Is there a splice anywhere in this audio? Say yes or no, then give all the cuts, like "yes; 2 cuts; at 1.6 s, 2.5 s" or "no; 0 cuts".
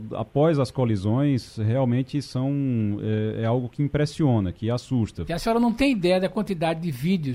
yes; 1 cut; at 5.3 s